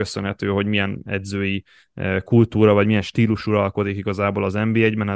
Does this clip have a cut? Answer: no; 0 cuts

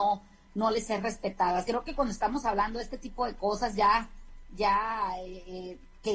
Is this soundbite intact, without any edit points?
yes; 0 cuts

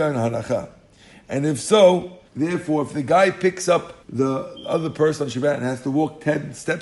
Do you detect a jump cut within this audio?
yes; 2 cuts; at 2.3 s, 4.0 s

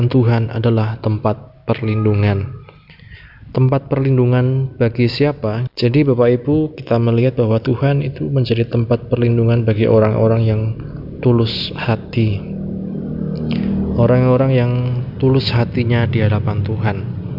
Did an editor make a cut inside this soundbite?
yes; 1 cut; at 5.7 s

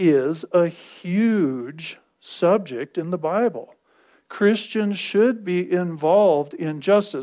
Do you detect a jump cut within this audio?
no; 0 cuts

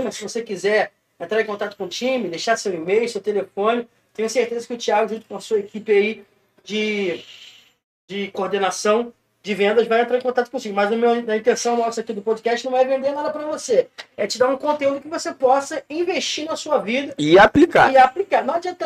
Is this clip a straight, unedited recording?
yes; 0 cuts

